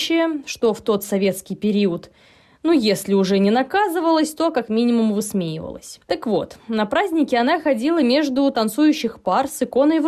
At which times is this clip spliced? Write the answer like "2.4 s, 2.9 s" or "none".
6.0 s